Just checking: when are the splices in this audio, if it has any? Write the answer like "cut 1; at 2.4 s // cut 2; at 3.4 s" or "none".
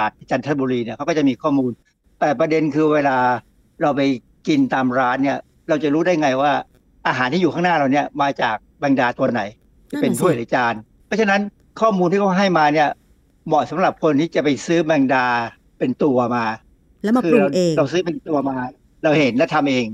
none